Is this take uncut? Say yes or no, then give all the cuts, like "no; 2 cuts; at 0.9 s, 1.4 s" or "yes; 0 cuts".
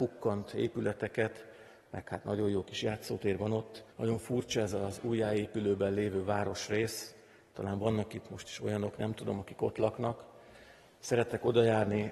no; 1 cut; at 3.9 s